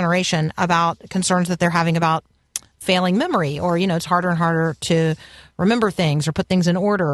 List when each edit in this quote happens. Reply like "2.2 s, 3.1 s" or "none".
none